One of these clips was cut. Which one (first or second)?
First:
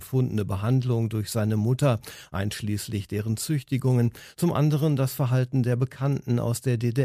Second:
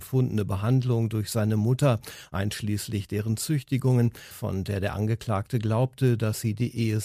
second